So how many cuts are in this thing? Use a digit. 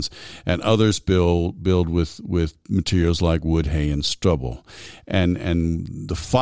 0